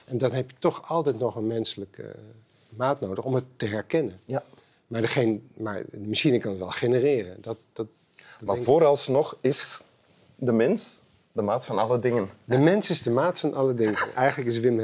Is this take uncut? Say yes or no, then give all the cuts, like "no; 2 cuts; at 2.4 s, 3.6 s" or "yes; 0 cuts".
yes; 0 cuts